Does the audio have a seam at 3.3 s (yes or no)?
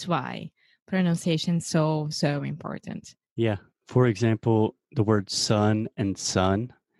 yes